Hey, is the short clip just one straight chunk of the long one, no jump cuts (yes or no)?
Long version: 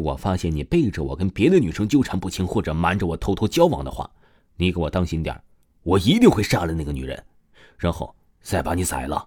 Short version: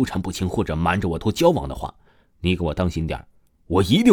no